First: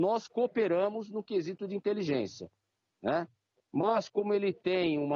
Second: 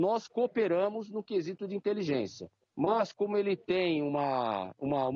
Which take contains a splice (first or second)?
second